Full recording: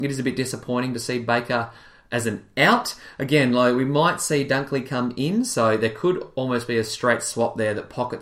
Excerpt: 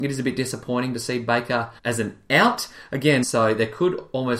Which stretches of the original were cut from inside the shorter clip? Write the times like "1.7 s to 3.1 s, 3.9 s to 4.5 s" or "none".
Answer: 1.8 s to 2.0 s, 3.5 s to 5.5 s

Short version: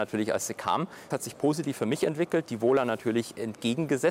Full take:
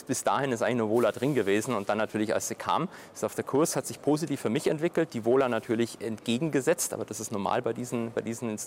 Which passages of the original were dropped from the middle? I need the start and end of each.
3.1 s to 3.7 s

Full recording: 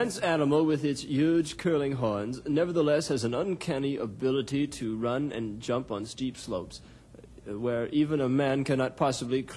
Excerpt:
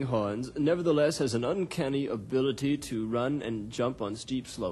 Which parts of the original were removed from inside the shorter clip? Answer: none

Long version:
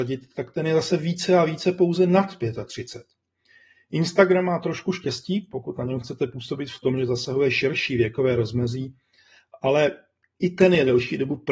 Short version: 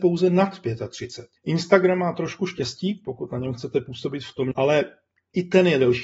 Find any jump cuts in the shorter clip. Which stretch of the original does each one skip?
3.1 s to 3.8 s, 7.0 s to 9.6 s

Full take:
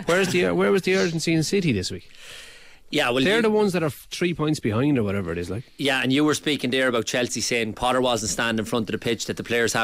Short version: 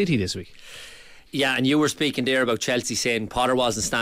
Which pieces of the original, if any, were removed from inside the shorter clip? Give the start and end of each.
2.8 s to 5.7 s

